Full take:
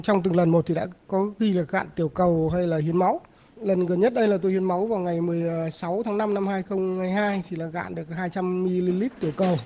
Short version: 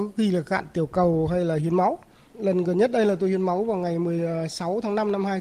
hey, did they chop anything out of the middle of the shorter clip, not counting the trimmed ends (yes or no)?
no